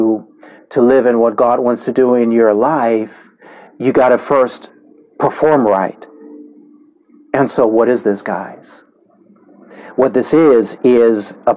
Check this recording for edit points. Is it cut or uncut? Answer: uncut